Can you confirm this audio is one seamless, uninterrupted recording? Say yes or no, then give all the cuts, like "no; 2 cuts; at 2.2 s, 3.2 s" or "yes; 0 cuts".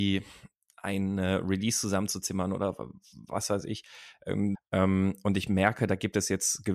no; 1 cut; at 4.6 s